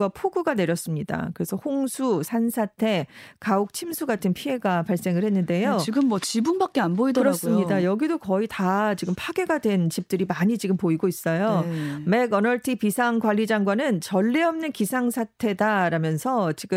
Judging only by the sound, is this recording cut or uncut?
uncut